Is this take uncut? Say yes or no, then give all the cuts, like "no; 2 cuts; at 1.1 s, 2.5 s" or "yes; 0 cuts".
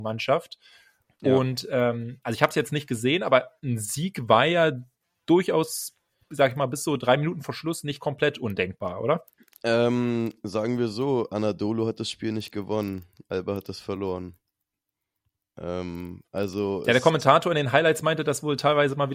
yes; 0 cuts